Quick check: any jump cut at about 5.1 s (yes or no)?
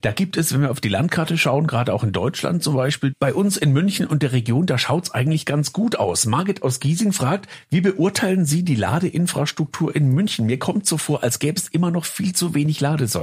no